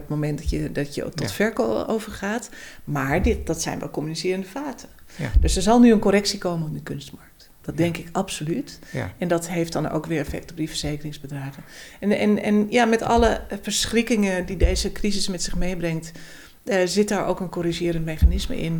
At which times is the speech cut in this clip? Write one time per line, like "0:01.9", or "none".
none